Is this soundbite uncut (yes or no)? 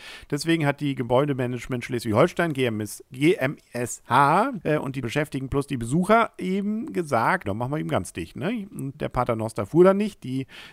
no